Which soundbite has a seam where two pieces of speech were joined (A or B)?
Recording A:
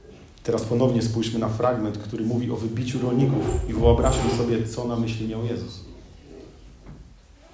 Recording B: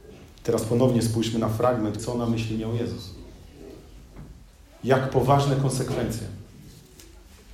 B